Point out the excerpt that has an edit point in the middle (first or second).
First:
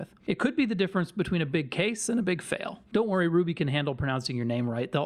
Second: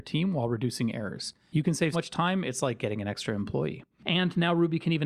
second